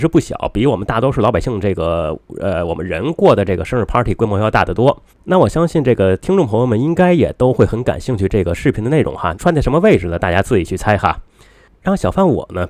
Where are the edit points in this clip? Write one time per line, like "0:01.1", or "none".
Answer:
0:05.1
0:09.3